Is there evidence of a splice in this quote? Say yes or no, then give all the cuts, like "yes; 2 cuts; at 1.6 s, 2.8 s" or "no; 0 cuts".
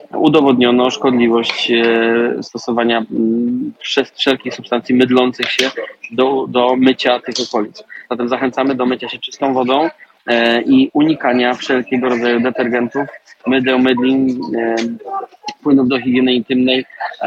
no; 0 cuts